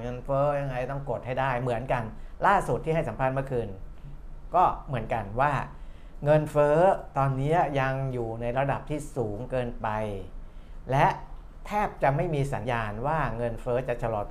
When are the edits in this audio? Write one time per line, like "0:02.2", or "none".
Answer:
0:12.6